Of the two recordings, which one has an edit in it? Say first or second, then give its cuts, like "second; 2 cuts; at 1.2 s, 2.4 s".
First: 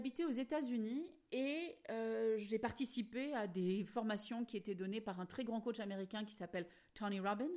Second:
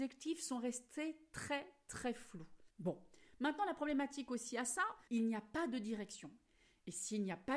second; 2 cuts; at 2.7 s, 5.1 s